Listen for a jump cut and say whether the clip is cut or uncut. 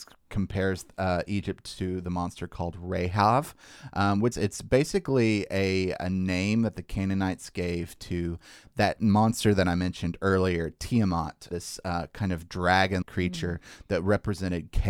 cut